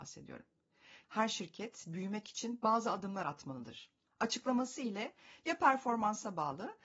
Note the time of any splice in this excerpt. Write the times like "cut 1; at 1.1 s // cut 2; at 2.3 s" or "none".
cut 1; at 1.0 s // cut 2; at 4.1 s